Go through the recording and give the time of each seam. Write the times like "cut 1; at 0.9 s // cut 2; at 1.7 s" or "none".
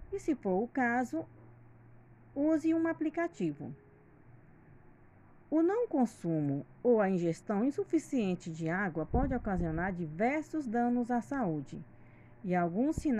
none